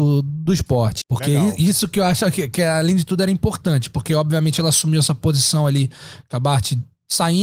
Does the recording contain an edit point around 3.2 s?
no; 1 cut; at 1.0 s

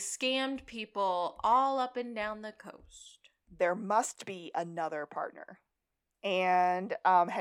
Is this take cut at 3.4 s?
no; 1 cut; at 6.1 s

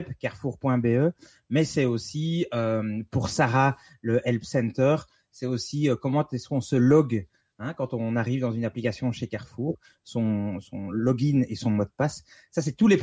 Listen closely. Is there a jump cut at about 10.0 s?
no; 0 cuts

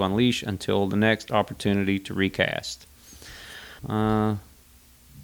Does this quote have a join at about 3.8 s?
yes; 1 cut; at 3.8 s

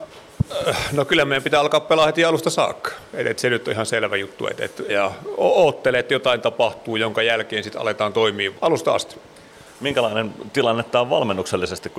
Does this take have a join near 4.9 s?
yes; 2 cuts; at 4.9 s, 8.6 s

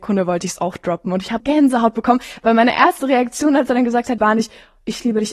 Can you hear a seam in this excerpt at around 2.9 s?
no; 2 cuts; at 1.4 s, 4.2 s

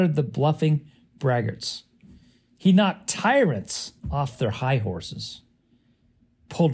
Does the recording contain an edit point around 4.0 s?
yes; 1 cut; at 4.0 s

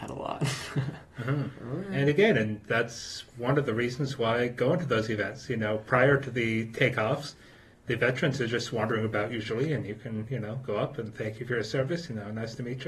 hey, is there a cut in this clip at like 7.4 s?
no; 0 cuts

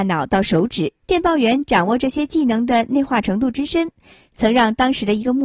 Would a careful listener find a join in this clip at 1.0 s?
yes; 1 cut; at 1.0 s

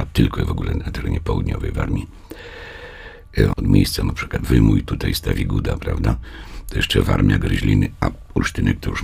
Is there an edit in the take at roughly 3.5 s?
yes; 1 cut; at 3.5 s

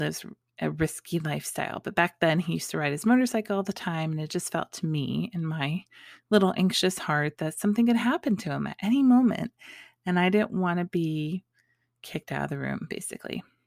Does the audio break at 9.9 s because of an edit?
no; 0 cuts

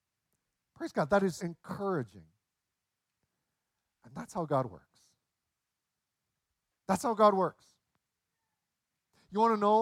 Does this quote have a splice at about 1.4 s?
yes; 1 cut; at 1.4 s

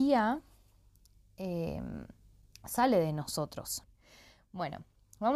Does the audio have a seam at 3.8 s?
yes; 1 cut; at 3.8 s

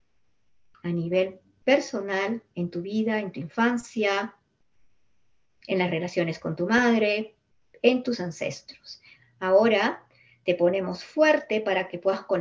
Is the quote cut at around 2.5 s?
no; 1 cut; at 9.2 s

